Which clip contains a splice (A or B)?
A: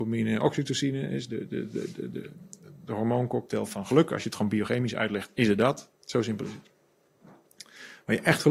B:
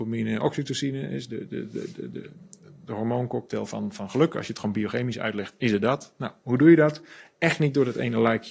A